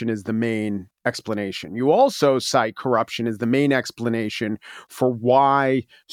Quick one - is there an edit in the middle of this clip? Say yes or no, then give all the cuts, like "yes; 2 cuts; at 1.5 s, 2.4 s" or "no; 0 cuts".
no; 0 cuts